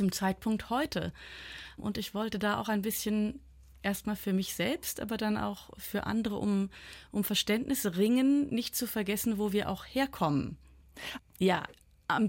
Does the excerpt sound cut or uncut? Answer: cut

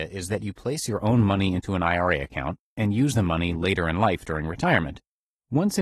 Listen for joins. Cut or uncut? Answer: uncut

